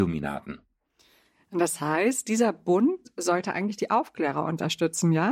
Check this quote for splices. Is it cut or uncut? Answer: uncut